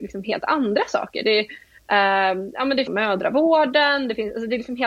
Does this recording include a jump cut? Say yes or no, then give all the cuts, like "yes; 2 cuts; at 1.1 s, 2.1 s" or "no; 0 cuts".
yes; 1 cut; at 2.9 s